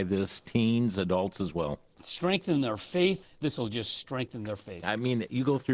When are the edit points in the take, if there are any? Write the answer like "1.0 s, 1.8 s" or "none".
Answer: 3.2 s, 4.8 s